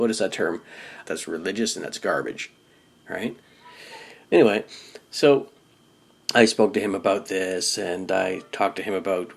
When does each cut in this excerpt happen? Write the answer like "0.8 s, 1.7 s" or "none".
1.1 s